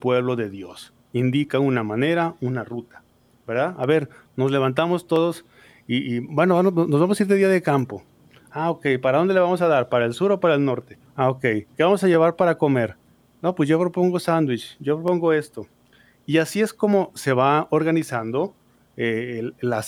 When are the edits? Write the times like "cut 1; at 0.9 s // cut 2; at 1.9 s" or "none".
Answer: cut 1; at 4.3 s // cut 2; at 11.1 s